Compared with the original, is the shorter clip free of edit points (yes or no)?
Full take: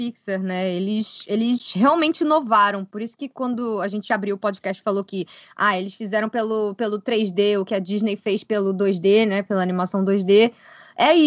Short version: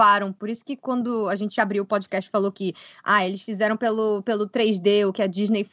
yes